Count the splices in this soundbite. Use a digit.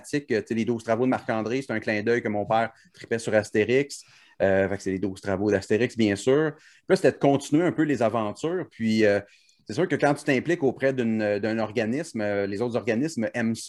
0